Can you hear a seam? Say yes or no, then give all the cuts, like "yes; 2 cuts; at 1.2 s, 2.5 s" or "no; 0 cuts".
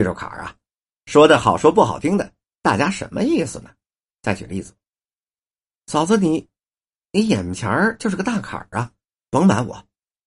no; 0 cuts